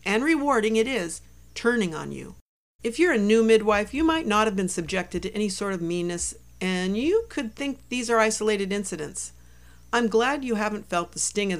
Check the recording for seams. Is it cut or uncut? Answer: cut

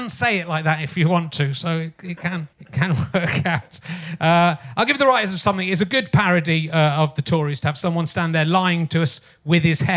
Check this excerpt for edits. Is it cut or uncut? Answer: cut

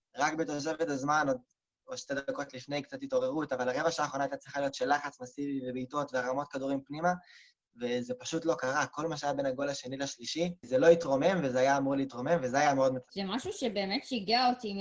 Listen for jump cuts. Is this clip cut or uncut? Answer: cut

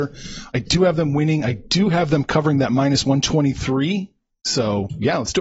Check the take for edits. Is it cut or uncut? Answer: uncut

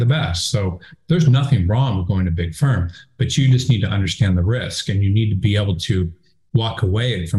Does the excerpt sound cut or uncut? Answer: uncut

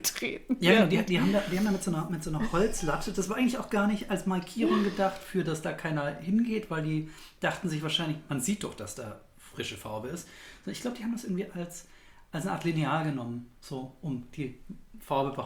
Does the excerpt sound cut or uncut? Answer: uncut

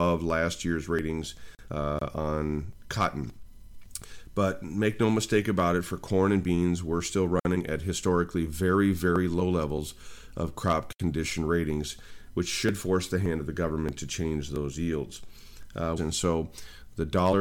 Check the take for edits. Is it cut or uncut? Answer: cut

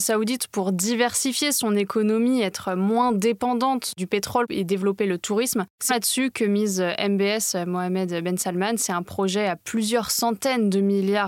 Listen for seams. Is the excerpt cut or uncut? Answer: cut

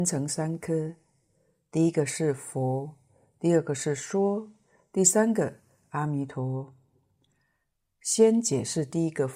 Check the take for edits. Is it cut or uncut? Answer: uncut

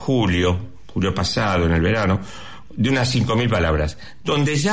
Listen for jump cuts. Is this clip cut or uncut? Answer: uncut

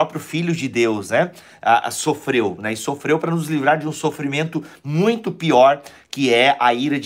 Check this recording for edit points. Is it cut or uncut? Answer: uncut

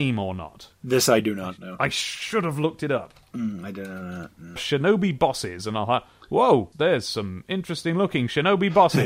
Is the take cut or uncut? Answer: cut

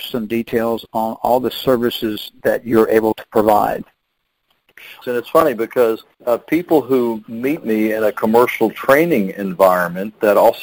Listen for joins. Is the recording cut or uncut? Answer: cut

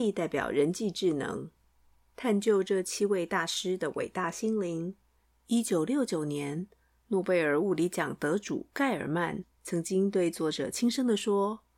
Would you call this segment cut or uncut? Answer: cut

